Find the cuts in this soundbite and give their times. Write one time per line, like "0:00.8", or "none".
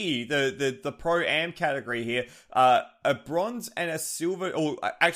none